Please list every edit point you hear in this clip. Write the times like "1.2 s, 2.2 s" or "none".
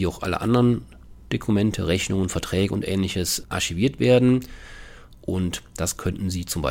3.4 s